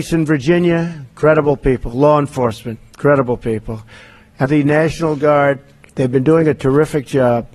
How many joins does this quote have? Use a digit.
2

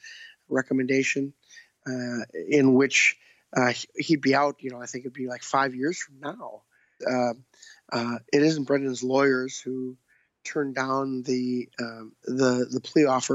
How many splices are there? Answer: 2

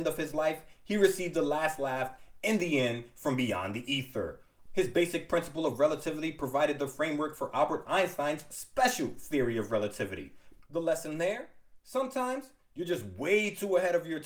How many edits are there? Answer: 2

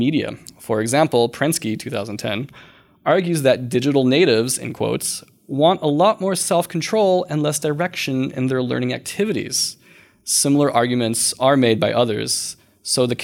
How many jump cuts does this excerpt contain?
0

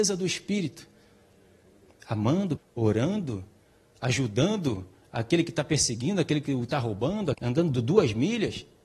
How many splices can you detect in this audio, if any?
2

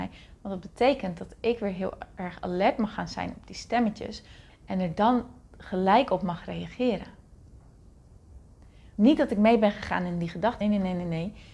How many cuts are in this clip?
3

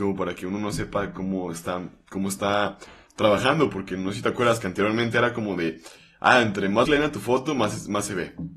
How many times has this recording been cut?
1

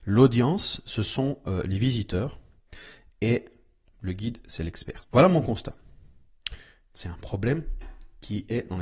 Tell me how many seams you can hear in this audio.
2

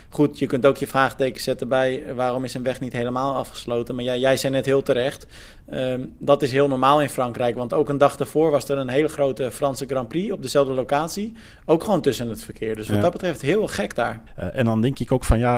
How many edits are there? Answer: 1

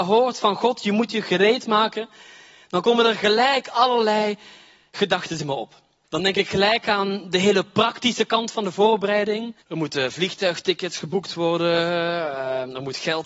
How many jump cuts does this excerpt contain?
2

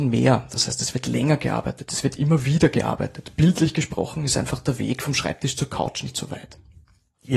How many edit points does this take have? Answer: 0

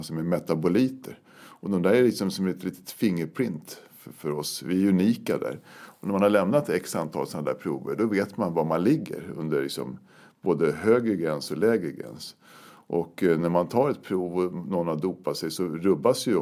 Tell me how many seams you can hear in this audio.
0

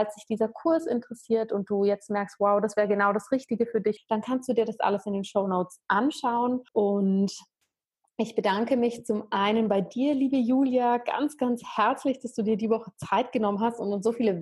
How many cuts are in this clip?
2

